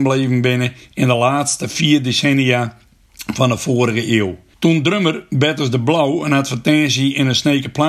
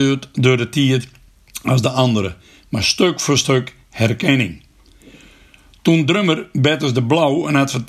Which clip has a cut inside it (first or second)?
first